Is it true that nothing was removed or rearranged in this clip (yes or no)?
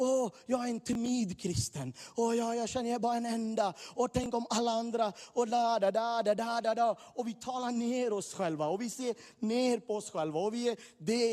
yes